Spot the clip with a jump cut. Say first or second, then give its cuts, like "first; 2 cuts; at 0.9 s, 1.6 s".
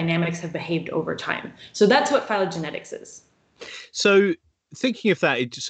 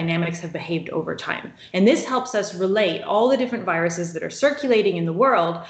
second; 1 cut; at 1.7 s